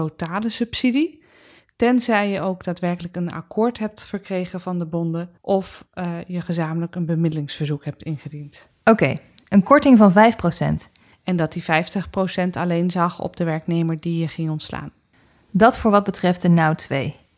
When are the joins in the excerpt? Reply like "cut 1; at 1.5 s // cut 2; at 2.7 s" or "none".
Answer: cut 1; at 5.4 s // cut 2; at 11.1 s